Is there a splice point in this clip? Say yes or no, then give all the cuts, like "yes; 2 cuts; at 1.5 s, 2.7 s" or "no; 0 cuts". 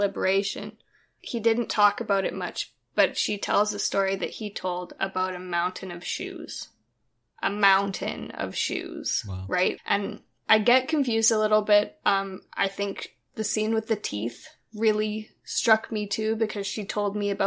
yes; 1 cut; at 9.8 s